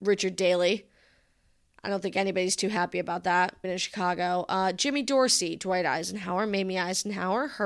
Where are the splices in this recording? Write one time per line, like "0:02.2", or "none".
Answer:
0:03.6